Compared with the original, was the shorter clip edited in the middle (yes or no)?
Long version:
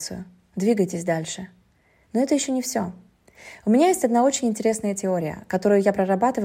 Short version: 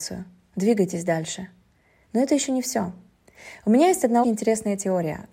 yes